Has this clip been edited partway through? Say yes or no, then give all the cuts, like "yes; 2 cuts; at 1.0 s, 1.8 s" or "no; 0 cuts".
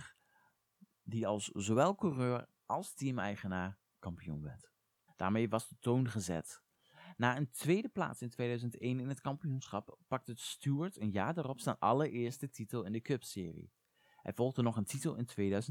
yes; 1 cut; at 5.1 s